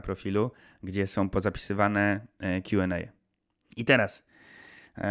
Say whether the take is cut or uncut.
cut